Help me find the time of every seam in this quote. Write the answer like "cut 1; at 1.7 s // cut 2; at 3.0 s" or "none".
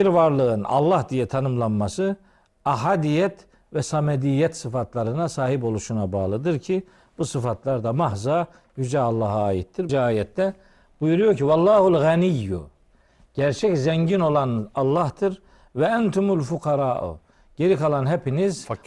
cut 1; at 9.9 s